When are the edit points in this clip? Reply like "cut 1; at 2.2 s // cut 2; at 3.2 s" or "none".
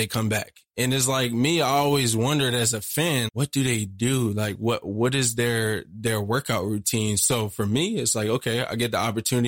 cut 1; at 3.3 s